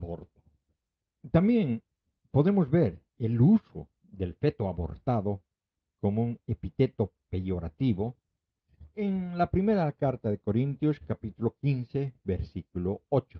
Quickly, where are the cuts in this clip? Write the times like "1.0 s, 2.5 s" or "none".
none